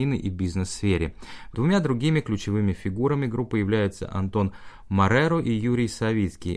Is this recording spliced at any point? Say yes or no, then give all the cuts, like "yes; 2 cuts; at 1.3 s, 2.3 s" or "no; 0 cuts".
yes; 1 cut; at 1.5 s